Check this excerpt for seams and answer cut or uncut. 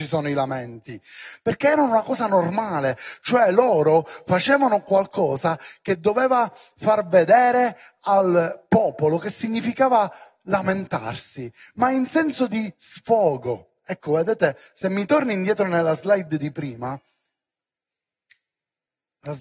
uncut